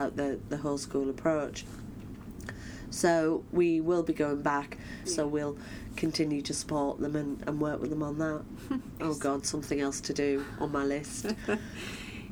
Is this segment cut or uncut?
cut